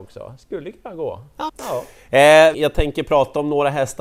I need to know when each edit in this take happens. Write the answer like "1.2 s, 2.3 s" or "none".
1.5 s, 2.5 s